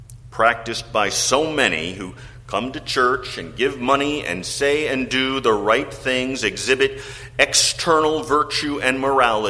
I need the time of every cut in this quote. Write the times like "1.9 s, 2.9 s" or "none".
none